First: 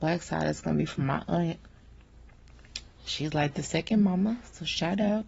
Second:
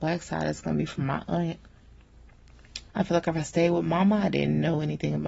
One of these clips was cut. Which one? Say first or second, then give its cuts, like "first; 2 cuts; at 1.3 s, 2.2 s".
second; 1 cut; at 2.9 s